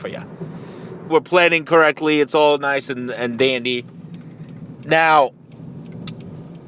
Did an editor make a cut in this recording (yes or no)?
yes